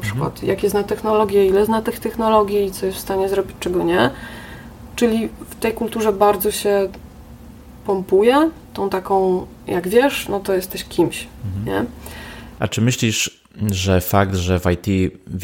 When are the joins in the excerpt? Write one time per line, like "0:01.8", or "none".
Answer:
0:08.7
0:12.6